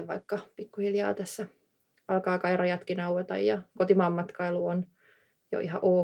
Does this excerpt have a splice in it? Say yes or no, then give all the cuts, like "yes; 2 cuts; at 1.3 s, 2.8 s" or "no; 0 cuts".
yes; 1 cut; at 3.7 s